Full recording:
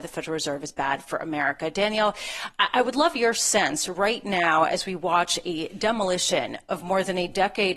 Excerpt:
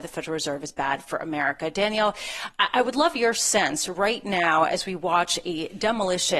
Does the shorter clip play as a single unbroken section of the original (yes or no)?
yes